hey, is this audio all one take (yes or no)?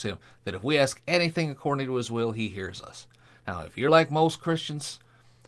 yes